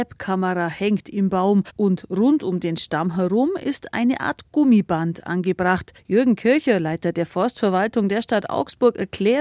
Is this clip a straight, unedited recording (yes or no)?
yes